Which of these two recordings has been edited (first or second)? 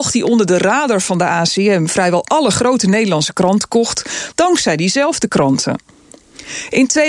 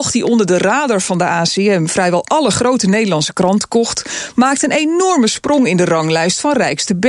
first